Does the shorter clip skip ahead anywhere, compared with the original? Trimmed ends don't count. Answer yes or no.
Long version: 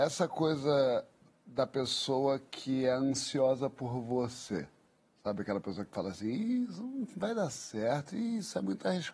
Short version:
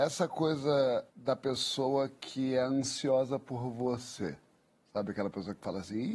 yes